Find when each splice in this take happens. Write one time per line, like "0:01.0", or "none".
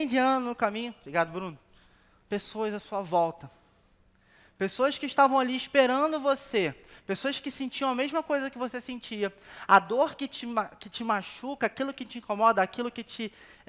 none